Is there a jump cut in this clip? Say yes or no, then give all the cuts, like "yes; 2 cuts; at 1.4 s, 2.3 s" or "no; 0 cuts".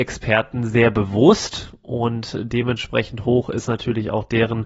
no; 0 cuts